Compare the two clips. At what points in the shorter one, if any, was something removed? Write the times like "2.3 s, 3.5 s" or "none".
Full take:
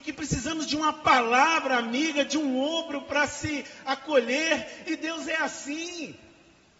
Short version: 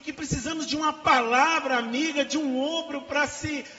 none